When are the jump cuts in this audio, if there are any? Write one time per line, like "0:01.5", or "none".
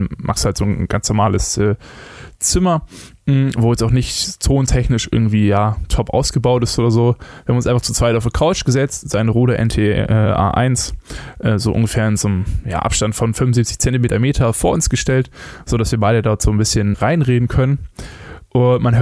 0:16.9